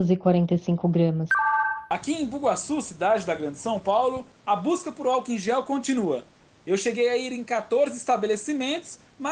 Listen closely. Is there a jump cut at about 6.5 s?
no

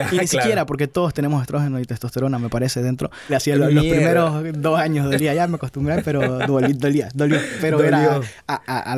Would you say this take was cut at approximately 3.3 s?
yes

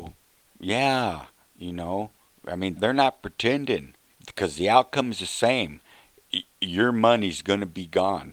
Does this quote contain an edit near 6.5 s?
no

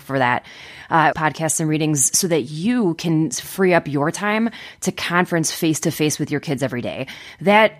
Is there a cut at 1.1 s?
yes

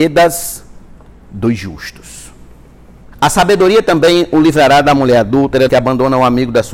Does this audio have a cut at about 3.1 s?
yes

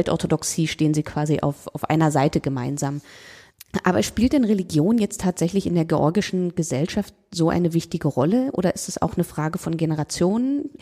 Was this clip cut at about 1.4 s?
no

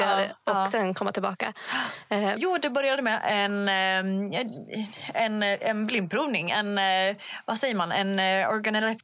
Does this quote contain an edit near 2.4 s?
yes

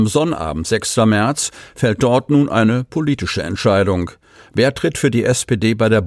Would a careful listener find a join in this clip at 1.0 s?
no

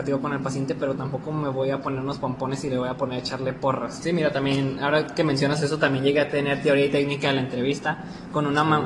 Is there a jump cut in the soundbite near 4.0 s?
yes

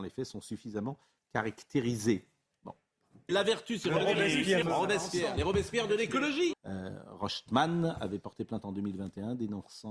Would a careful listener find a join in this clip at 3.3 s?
yes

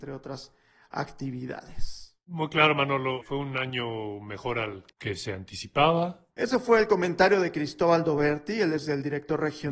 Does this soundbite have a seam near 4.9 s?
yes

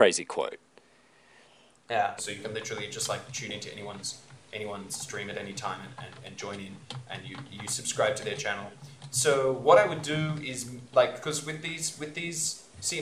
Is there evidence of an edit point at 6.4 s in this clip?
no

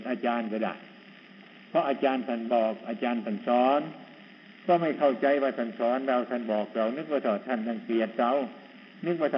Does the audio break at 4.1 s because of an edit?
no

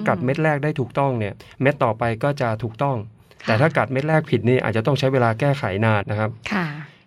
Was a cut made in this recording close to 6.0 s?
yes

